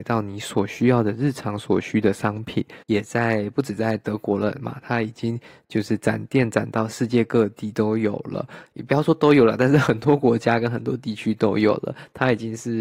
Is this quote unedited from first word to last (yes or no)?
no